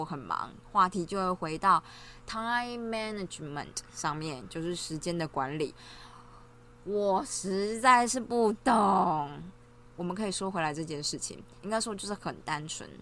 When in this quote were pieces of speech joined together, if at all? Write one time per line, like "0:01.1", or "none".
0:09.9
0:11.6

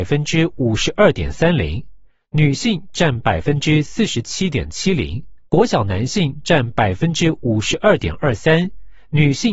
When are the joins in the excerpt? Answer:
0:05.5

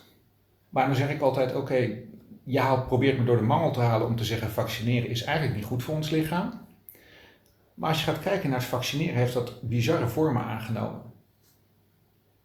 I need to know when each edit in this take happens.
none

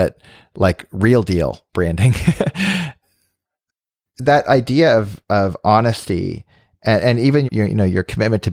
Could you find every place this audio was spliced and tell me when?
0:07.4

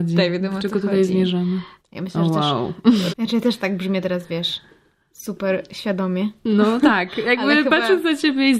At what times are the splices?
0:01.8
0:03.1

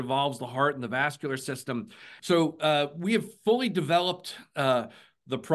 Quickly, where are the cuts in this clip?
0:02.2

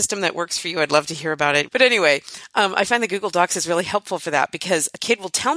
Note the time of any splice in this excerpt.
0:01.7

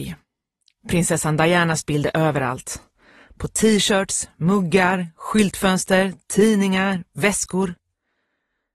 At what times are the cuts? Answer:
none

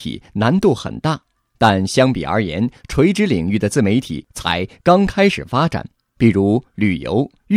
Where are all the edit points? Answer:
none

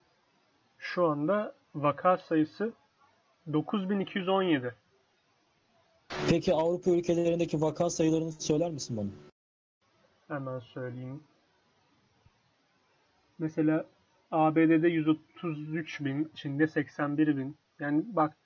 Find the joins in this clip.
0:01.6
0:16.3

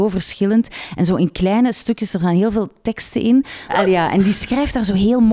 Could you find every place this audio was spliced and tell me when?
0:03.7

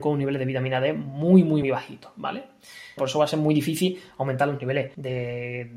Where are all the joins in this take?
0:01.6
0:03.0

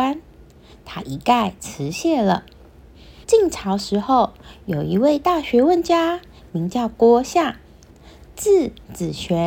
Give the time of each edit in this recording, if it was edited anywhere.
0:03.2

